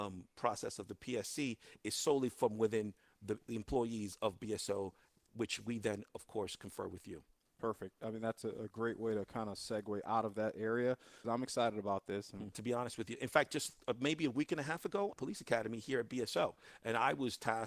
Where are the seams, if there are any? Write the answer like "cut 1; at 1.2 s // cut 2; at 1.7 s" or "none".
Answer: cut 1; at 11.2 s // cut 2; at 12.5 s // cut 3; at 15.1 s

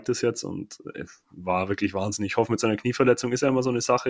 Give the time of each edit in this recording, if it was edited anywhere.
none

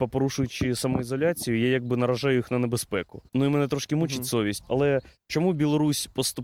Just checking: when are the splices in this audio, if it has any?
cut 1; at 3.3 s // cut 2; at 4.6 s

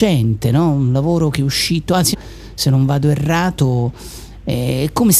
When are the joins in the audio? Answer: cut 1; at 2.1 s

